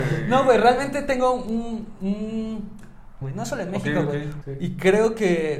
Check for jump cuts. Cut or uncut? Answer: cut